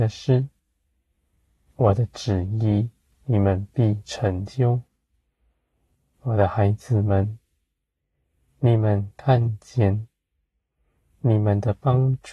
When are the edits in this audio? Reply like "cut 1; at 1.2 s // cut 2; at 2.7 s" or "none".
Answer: none